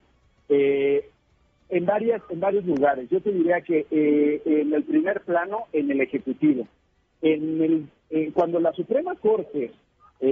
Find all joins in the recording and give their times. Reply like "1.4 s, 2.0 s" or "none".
none